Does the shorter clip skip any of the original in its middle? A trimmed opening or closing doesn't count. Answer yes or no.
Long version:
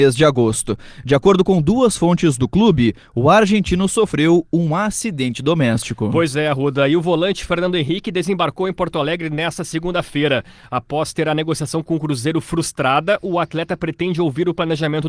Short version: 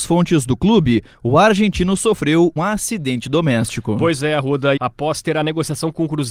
yes